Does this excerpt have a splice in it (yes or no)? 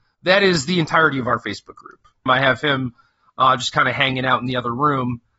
yes